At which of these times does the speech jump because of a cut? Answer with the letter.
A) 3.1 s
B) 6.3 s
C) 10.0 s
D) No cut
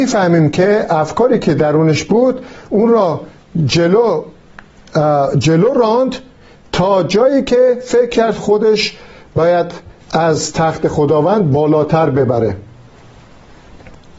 C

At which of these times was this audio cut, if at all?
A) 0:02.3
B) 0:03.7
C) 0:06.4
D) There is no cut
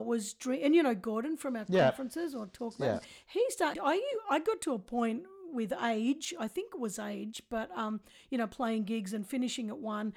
B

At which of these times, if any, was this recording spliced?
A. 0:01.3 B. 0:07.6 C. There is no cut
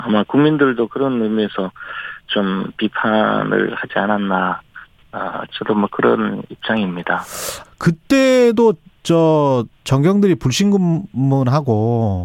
B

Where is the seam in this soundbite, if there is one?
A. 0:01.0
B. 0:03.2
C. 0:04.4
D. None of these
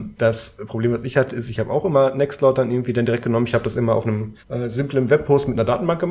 C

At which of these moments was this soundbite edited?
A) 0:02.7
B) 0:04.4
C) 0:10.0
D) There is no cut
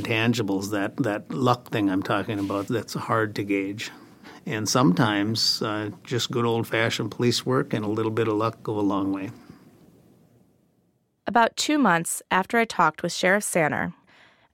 A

